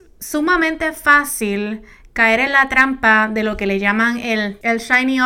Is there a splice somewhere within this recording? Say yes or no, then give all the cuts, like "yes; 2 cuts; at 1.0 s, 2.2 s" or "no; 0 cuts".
no; 0 cuts